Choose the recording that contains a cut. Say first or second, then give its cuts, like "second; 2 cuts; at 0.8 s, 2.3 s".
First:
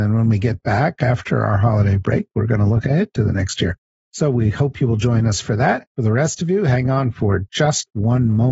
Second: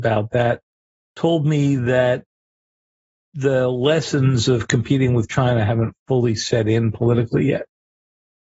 first; 1 cut; at 5.9 s